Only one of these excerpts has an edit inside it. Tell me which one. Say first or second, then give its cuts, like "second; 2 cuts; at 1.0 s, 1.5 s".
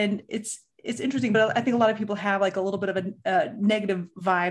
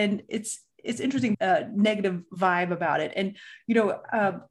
second; 1 cut; at 1.3 s